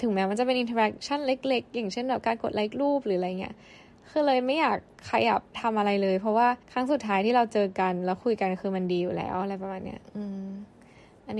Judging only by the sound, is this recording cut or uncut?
cut